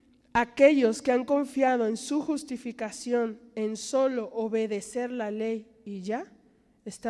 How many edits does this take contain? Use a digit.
0